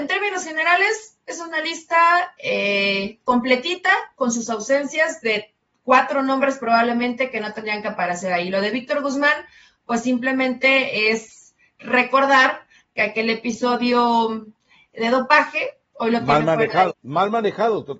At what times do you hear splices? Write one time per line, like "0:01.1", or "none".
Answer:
0:16.9

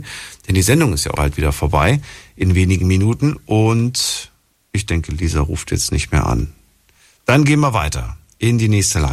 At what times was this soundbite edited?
0:01.2

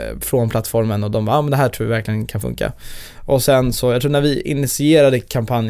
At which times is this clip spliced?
none

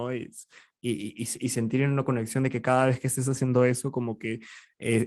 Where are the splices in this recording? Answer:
none

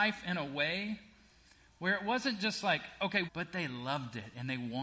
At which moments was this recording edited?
0:03.3

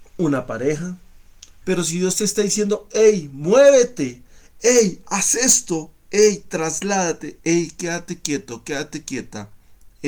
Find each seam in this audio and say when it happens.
0:01.6

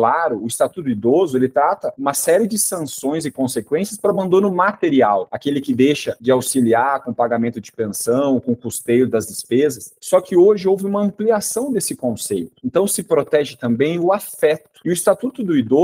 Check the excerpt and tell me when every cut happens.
none

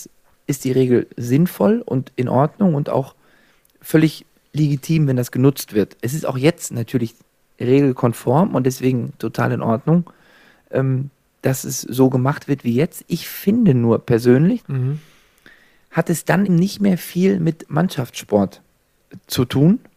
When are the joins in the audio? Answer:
0:14.6
0:16.5

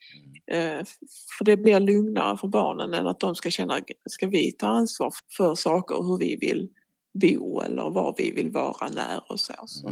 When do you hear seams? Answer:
0:05.2

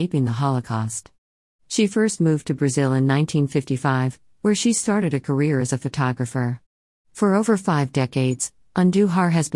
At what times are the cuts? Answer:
none

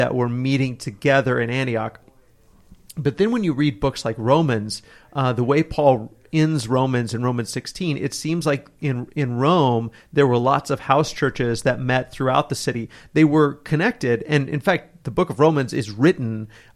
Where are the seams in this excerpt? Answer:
none

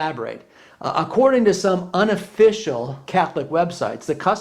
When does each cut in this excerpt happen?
0:03.0

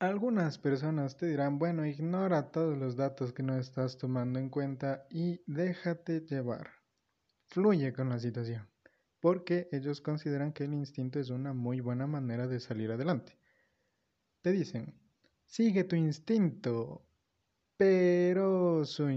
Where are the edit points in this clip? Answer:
none

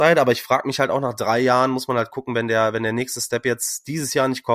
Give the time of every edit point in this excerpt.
none

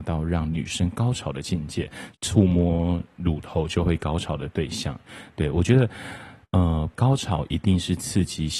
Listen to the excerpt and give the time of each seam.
0:02.1
0:06.9

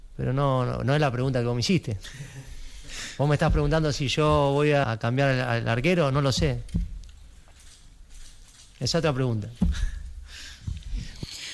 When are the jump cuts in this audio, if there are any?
0:04.8

